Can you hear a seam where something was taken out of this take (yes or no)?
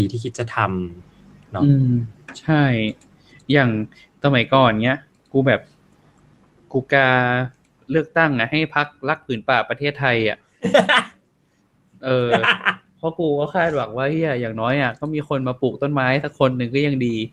no